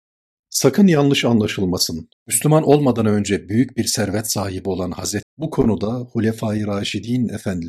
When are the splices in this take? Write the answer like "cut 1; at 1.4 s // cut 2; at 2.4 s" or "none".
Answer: cut 1; at 2.1 s // cut 2; at 5.2 s